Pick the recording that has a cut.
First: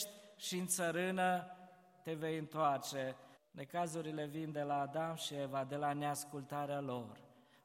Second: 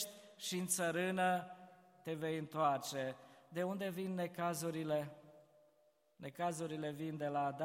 first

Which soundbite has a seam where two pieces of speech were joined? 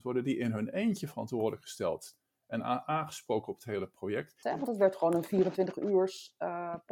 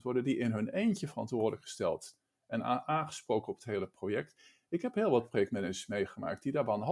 first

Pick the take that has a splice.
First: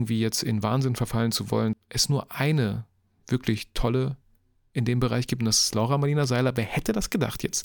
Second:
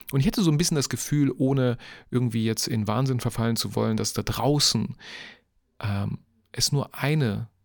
first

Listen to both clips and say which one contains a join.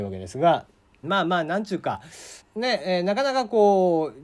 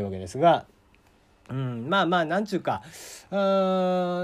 first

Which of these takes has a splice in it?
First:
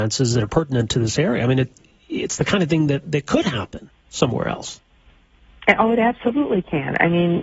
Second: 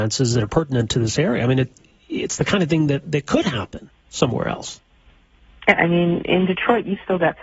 second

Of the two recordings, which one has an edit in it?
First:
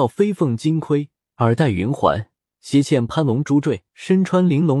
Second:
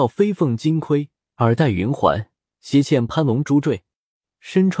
first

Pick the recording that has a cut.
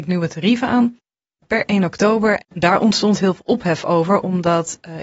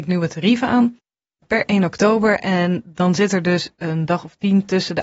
first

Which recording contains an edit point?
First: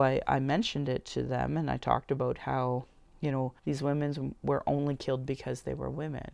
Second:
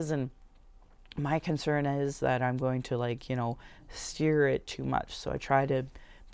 first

